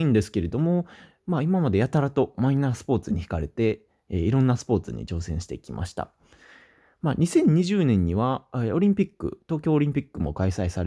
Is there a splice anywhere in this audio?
no; 0 cuts

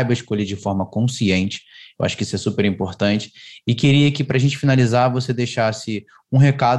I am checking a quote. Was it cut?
no; 0 cuts

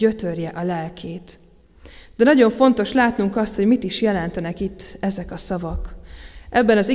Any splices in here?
no; 0 cuts

